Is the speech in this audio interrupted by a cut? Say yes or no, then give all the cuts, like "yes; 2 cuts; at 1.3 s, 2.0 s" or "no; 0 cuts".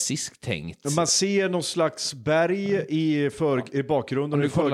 no; 0 cuts